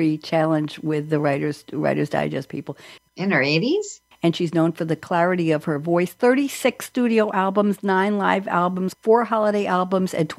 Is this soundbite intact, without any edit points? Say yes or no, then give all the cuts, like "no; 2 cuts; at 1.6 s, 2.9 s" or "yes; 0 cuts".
no; 3 cuts; at 3.0 s, 4.1 s, 8.9 s